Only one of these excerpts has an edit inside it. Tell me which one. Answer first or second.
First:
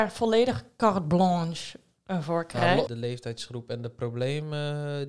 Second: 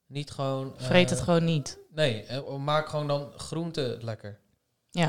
first